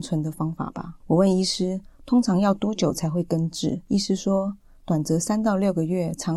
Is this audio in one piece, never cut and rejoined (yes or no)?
yes